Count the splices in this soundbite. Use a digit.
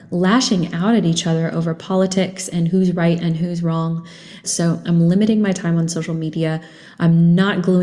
1